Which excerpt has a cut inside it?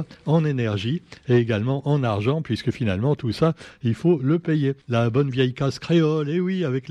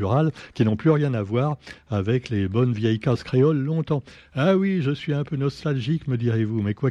first; 1 cut; at 4.8 s

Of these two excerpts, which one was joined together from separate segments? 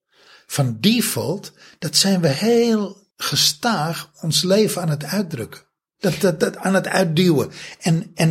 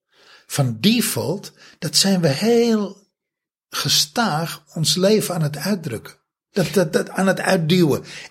first; 1 cut; at 3.1 s

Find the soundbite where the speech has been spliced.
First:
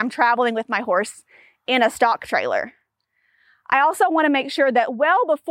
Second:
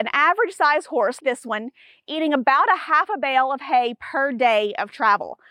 second; 1 cut; at 1.2 s

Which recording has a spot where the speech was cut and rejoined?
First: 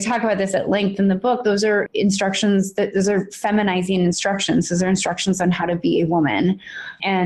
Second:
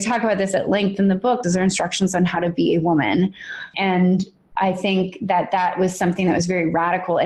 second; 1 cut; at 1.4 s

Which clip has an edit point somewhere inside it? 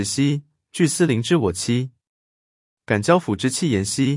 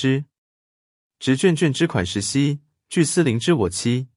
second; 1 cut; at 1.0 s

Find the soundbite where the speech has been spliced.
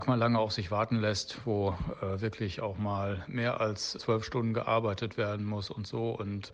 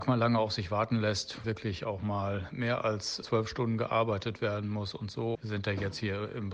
second; 2 cuts; at 1.4 s, 5.3 s

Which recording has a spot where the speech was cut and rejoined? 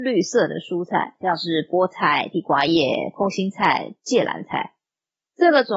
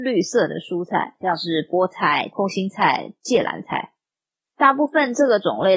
second; 2 cuts; at 2.3 s, 4.5 s

